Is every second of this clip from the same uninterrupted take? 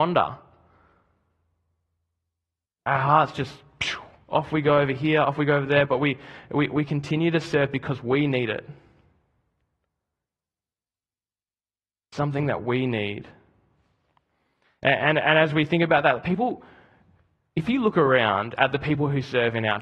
no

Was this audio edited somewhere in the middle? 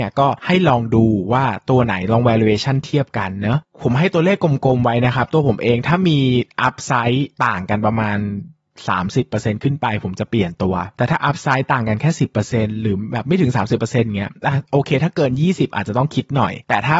yes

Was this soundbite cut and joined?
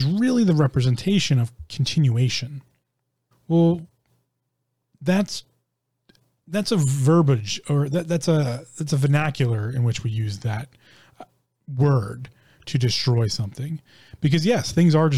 yes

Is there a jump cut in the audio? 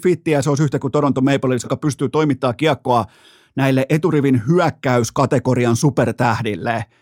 yes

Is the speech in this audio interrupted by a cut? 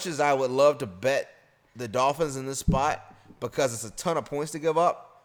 no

